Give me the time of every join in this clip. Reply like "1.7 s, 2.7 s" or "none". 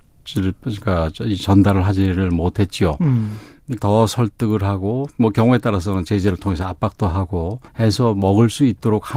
3.8 s, 7.7 s